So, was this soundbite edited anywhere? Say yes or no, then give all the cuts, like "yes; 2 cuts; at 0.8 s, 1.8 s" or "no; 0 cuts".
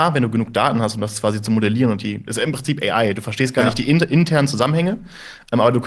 no; 0 cuts